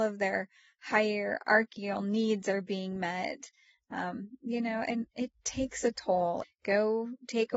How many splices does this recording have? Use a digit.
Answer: 1